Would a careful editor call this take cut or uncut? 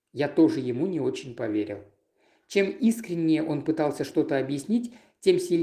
uncut